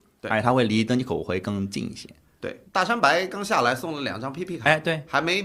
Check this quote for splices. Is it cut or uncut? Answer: cut